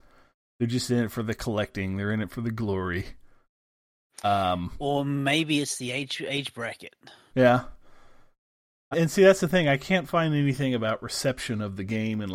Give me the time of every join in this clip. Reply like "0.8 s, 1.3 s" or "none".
7.3 s, 8.9 s